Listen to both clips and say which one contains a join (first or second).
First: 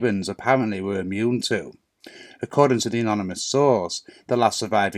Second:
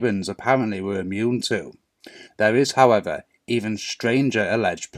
second